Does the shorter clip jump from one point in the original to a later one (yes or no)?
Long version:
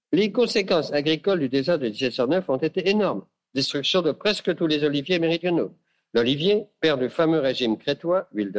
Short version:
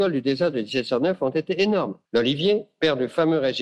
yes